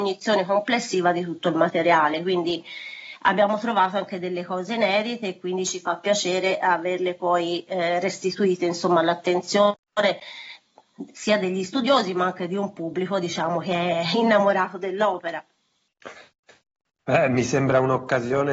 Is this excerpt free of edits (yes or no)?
yes